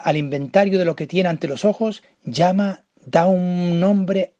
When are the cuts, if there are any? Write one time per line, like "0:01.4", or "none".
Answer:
none